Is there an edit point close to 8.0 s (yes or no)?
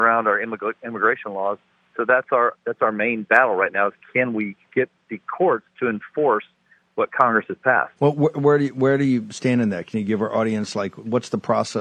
yes